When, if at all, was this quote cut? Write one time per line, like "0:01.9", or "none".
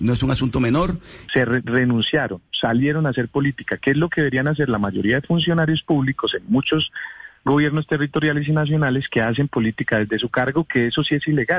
0:01.3